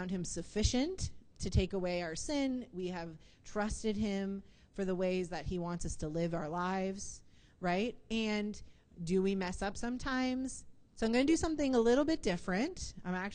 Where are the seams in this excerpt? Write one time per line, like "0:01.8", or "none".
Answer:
0:10.9

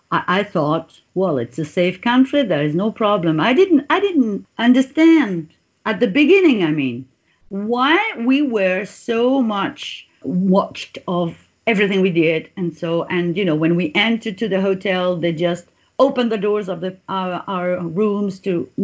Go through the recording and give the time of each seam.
none

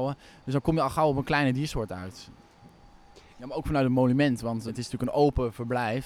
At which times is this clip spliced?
0:03.3
0:04.7

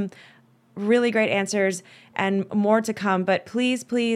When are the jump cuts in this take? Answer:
none

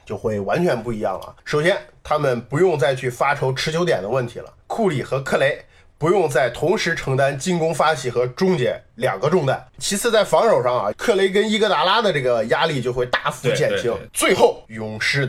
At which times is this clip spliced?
0:04.6
0:09.8
0:10.9

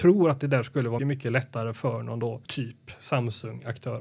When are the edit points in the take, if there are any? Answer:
0:01.0
0:02.5

